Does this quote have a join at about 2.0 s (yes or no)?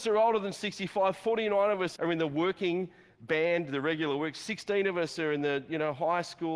yes